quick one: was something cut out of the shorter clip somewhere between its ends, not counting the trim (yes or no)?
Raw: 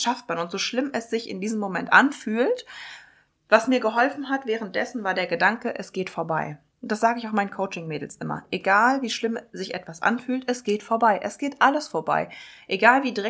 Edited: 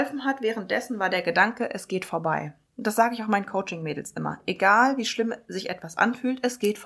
no